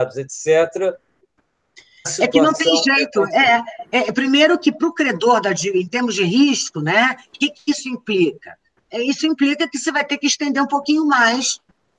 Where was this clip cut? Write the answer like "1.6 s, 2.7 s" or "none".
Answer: none